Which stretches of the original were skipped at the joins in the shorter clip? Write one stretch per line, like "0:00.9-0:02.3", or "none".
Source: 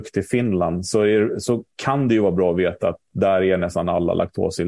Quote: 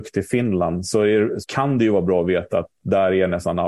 0:01.4-0:01.7